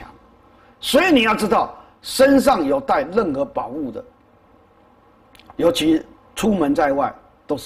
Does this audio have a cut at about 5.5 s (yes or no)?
yes